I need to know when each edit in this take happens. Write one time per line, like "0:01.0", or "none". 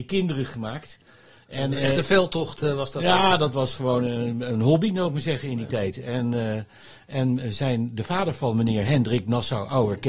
none